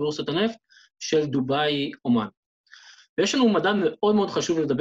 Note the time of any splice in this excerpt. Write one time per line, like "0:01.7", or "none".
none

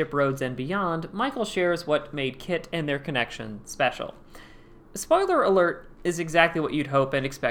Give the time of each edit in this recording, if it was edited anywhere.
none

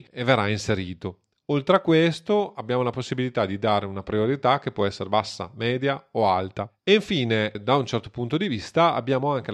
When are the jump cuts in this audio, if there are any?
none

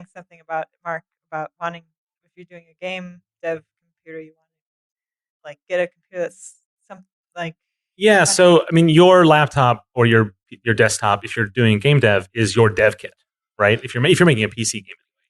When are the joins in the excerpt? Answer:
none

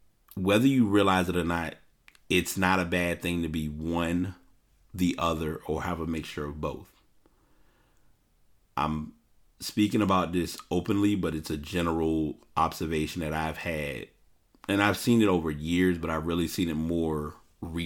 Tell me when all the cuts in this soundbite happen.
none

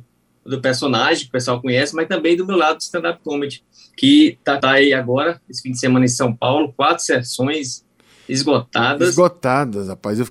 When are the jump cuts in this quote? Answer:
0:04.6

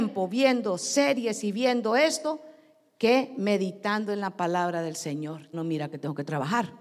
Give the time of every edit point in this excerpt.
0:05.5

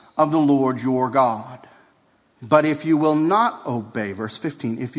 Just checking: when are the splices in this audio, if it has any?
0:02.3

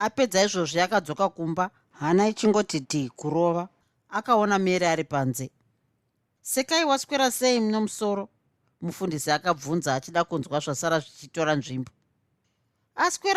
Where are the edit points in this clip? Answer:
0:02.8

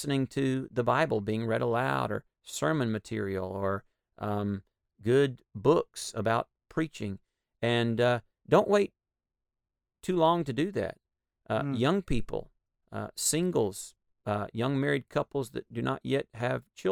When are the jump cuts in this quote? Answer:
none

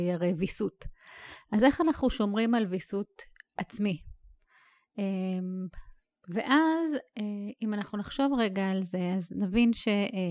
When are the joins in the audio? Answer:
none

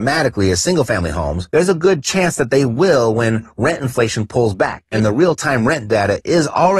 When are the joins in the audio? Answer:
none

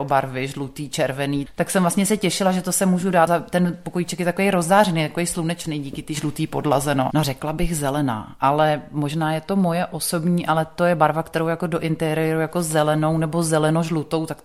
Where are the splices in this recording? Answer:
0:07.1

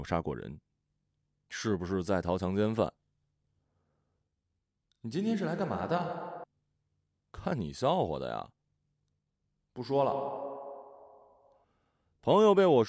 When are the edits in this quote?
none

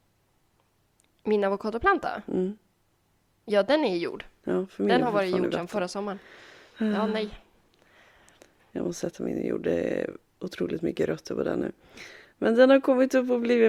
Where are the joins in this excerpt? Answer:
none

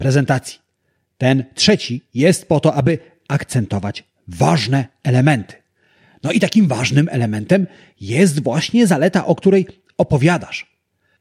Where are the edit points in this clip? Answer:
none

